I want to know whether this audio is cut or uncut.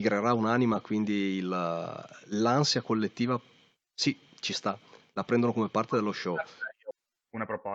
uncut